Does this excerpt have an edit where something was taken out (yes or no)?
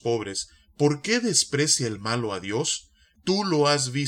yes